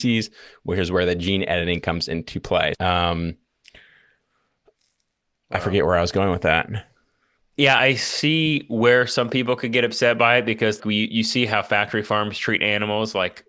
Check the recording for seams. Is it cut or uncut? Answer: cut